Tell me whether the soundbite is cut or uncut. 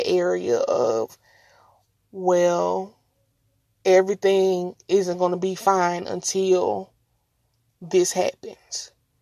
uncut